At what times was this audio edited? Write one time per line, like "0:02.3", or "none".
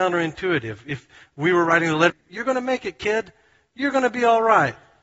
0:02.1